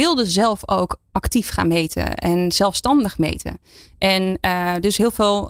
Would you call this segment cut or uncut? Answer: uncut